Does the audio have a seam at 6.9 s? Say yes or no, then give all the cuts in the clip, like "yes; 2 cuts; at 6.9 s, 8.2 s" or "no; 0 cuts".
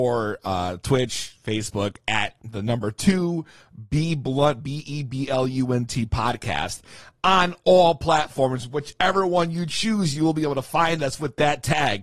no; 0 cuts